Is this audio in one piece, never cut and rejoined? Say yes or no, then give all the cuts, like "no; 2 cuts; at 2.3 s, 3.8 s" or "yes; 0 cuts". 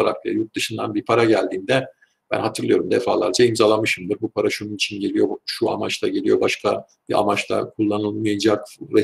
yes; 0 cuts